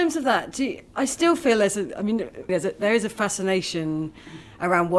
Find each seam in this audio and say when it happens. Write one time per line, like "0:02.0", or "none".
0:02.5

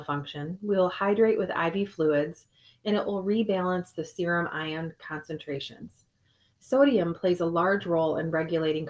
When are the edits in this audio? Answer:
0:06.5

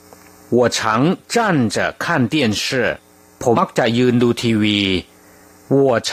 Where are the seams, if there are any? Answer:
0:03.5

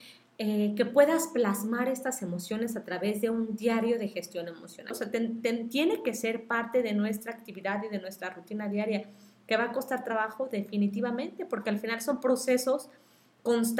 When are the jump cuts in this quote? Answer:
0:04.9

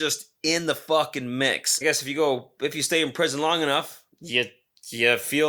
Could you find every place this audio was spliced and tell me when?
0:01.8
0:04.1

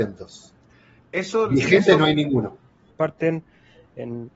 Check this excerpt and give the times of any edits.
0:02.9

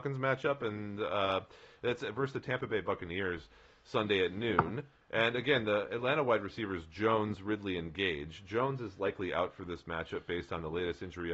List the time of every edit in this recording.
none

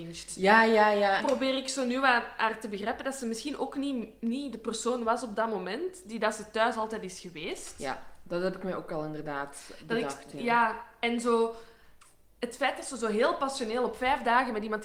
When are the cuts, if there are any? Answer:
0:01.2

